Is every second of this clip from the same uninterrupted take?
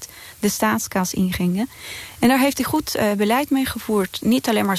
yes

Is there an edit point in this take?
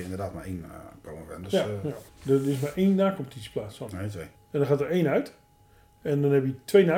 yes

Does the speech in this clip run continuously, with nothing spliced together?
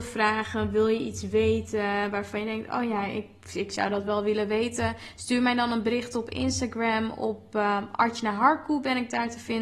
yes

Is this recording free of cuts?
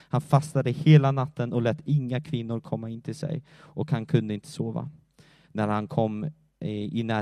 no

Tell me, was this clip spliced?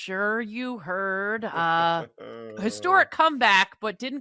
no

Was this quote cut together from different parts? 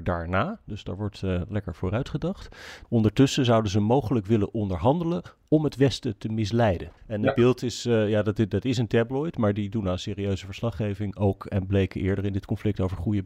yes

